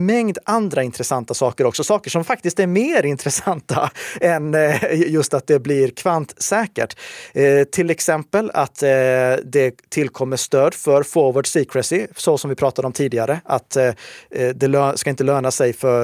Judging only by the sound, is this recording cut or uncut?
uncut